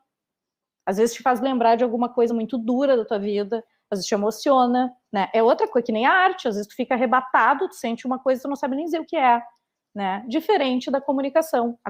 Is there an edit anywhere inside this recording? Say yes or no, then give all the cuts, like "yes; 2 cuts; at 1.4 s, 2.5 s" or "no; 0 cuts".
no; 0 cuts